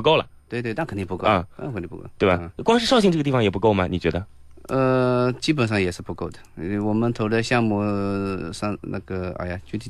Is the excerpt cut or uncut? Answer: uncut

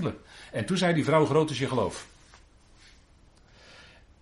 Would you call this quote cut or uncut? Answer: uncut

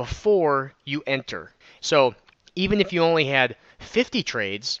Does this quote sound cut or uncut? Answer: cut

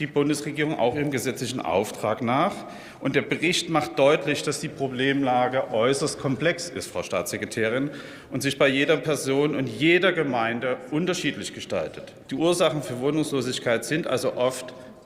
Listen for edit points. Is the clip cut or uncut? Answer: cut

